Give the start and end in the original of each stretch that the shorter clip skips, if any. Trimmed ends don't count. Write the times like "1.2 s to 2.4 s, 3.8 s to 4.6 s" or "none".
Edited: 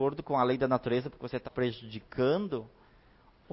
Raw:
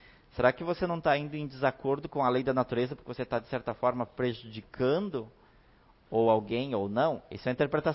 3.3 s to 4.1 s